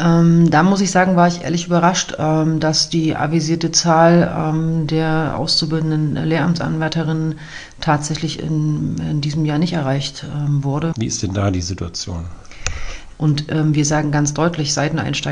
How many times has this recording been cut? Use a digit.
2